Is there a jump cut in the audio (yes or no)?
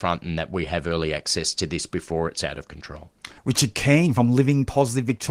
yes